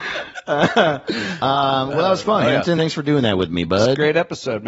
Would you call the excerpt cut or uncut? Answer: uncut